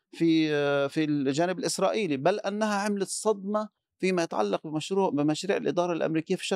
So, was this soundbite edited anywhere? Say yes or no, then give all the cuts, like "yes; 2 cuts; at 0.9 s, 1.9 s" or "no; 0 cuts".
no; 0 cuts